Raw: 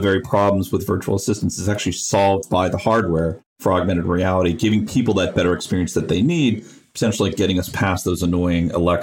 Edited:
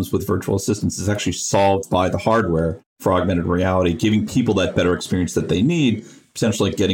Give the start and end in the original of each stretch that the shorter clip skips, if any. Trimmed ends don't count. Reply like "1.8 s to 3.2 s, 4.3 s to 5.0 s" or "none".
none